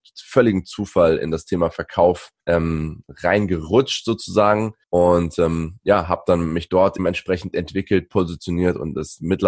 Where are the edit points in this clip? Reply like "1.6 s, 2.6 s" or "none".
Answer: 2.4 s, 4.8 s, 7.0 s